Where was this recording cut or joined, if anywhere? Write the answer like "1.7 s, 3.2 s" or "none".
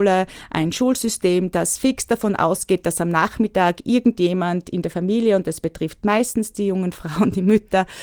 none